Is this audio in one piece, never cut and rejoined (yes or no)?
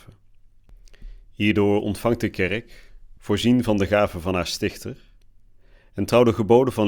yes